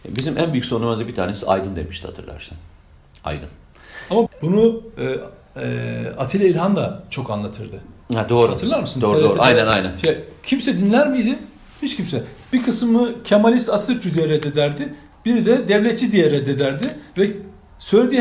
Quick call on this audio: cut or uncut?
cut